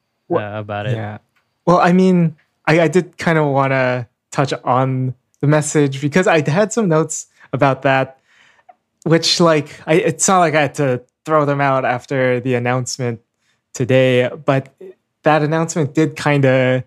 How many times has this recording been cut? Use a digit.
0